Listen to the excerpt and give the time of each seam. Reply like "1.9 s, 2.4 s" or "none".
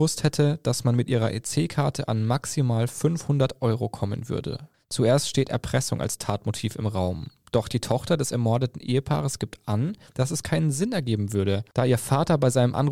4.7 s